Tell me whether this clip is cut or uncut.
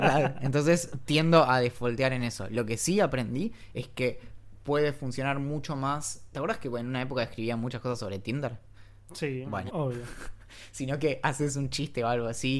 cut